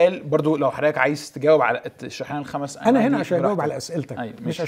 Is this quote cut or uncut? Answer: uncut